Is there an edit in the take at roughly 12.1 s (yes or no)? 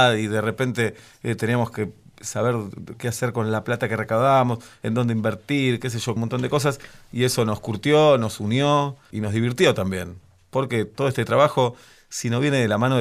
no